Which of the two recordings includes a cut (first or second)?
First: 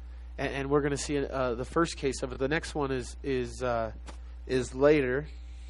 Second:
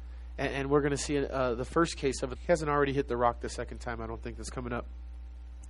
second